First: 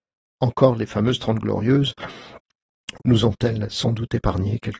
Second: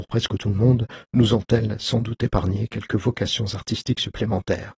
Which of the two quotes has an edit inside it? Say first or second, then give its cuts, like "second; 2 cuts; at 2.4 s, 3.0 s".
first; 1 cut; at 3.0 s